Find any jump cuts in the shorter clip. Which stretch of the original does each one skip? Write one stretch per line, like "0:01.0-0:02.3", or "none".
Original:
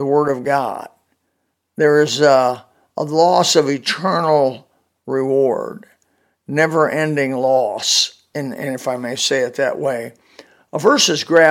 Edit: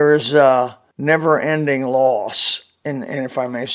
0:02.8-0:06.4